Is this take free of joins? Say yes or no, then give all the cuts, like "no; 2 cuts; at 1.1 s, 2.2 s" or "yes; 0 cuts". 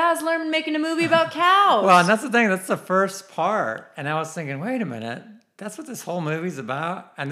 yes; 0 cuts